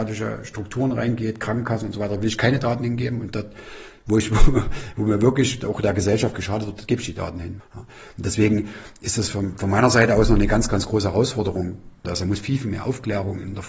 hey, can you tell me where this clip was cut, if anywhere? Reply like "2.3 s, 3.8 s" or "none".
7.6 s, 12.0 s